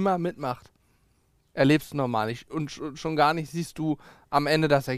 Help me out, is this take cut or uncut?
uncut